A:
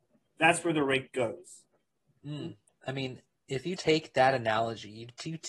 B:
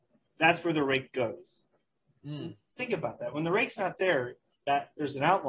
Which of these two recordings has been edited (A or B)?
A